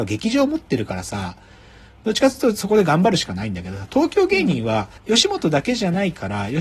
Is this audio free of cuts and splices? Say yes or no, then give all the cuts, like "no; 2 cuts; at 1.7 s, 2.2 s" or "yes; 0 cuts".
no; 1 cut; at 5.0 s